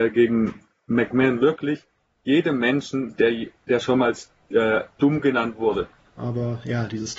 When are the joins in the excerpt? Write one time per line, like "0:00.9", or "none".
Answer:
0:06.0